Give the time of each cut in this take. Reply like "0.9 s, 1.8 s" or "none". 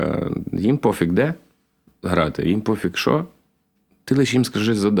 none